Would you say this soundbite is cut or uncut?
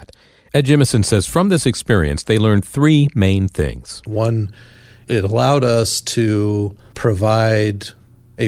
uncut